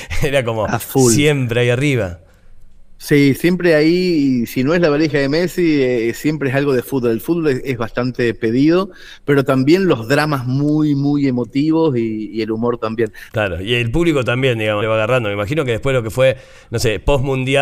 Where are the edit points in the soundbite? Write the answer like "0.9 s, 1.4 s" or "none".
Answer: 3.4 s, 13.3 s, 14.8 s